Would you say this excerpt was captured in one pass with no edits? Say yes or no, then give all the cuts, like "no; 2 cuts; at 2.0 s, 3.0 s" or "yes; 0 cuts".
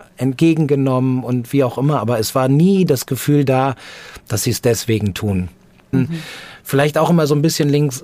no; 1 cut; at 5.9 s